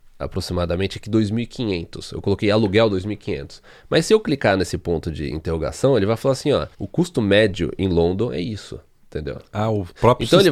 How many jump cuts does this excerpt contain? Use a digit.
1